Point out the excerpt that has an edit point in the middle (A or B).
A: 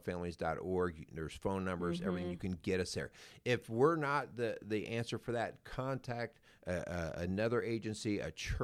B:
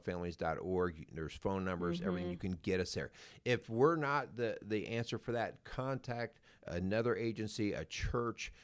B